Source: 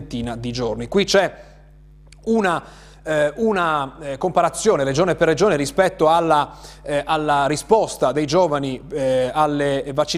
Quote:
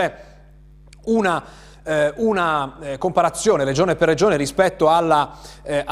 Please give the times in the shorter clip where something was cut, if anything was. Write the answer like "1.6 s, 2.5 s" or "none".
none